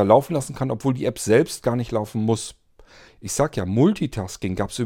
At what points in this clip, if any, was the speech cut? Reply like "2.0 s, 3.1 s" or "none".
3.1 s